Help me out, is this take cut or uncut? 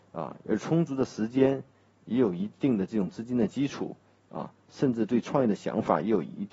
uncut